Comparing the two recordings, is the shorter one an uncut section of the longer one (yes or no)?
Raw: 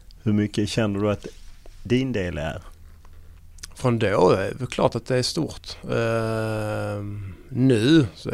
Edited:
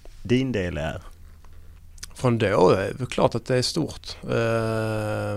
yes